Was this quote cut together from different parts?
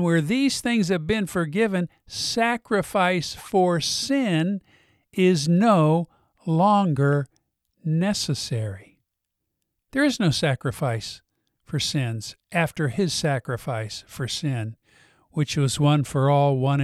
no; 0 cuts

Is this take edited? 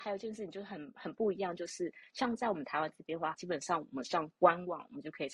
yes; 1 cut; at 3.3 s

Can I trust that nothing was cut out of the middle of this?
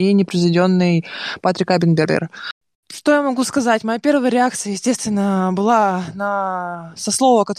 yes; 0 cuts

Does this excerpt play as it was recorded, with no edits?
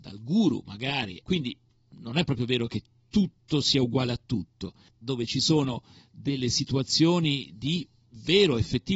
no; 2 cuts; at 1.2 s, 5.0 s

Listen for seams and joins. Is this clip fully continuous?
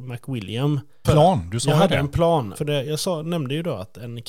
no; 2 cuts; at 1.0 s, 2.5 s

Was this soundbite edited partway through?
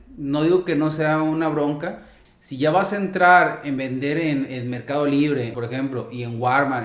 yes; 2 cuts; at 2.3 s, 5.5 s

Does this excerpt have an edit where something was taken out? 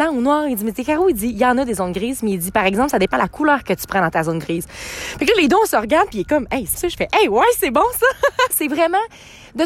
yes; 2 cuts; at 6.7 s, 8.5 s

